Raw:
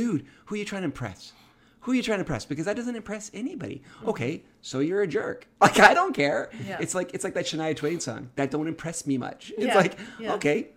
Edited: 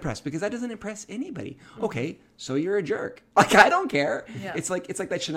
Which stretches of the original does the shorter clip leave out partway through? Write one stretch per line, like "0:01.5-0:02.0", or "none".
none